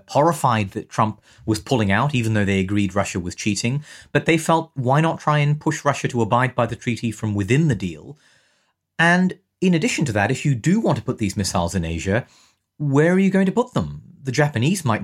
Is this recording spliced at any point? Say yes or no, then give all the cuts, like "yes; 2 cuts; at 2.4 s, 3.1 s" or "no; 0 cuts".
no; 0 cuts